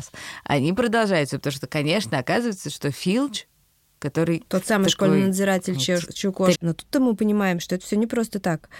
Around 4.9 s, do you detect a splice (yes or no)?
no